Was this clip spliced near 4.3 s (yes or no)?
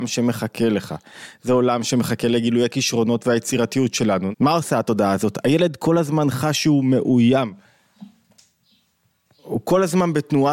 yes